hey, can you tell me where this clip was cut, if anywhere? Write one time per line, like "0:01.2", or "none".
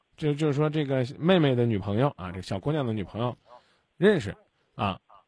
none